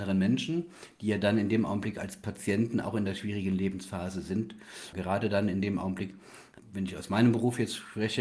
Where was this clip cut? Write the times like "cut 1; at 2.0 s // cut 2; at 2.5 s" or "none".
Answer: cut 1; at 4.9 s // cut 2; at 6.6 s